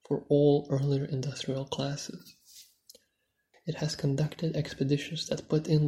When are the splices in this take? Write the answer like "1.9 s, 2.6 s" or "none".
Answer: 3.5 s